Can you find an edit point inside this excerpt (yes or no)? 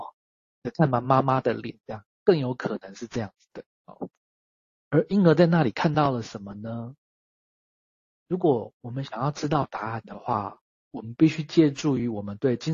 no